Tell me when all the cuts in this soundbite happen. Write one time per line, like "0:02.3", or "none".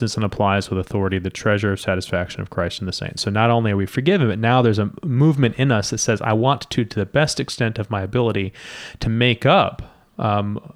0:03.2